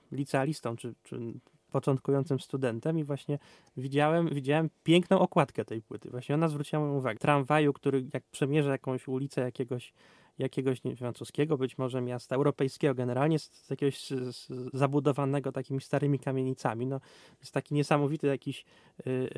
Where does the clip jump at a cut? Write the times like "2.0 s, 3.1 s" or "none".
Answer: 7.2 s